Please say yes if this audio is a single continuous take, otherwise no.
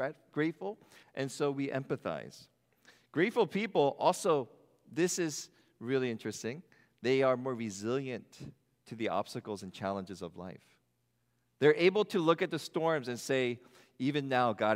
no